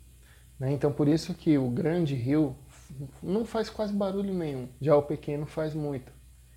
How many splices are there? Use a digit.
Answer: 1